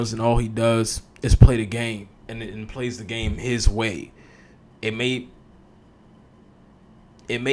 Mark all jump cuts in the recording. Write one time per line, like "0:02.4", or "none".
none